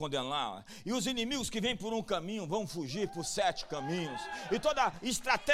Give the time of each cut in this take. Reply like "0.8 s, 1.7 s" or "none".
none